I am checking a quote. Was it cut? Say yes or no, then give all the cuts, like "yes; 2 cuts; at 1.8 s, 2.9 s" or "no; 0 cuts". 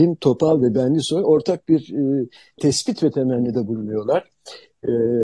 yes; 1 cut; at 2.6 s